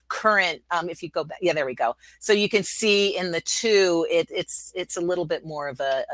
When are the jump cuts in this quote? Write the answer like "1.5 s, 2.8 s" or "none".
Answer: none

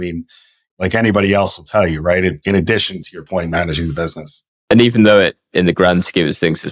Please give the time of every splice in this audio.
2.4 s

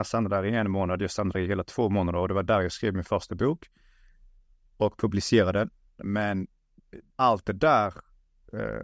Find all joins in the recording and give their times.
6.0 s, 7.1 s

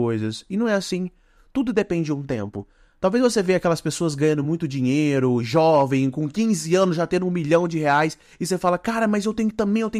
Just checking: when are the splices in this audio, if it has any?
none

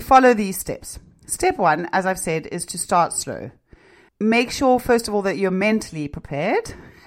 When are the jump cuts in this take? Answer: 4.1 s

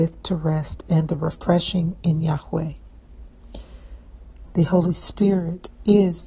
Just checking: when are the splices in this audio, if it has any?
4.5 s

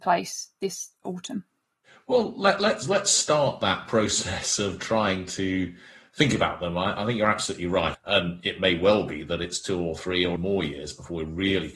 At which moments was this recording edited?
7.9 s, 10.4 s

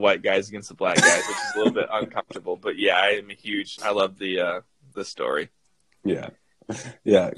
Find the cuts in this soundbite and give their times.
3.8 s

